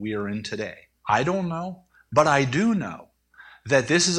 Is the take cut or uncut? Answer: cut